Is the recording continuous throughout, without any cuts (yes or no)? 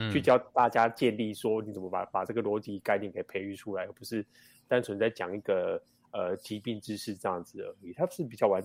yes